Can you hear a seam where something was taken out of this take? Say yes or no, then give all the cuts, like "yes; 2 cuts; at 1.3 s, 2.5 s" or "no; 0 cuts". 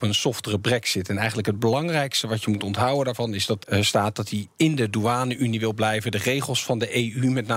yes; 1 cut; at 3.6 s